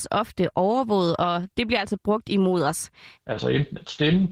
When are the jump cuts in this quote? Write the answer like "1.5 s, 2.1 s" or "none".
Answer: 3.1 s